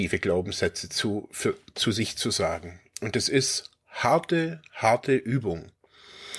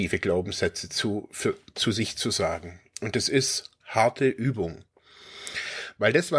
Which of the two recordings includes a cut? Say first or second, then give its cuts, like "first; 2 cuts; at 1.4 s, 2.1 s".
second; 1 cut; at 3.8 s